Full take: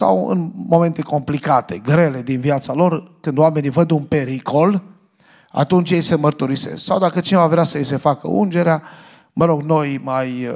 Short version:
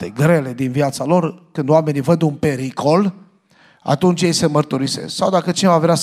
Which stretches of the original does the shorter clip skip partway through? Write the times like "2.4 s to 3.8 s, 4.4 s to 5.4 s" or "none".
none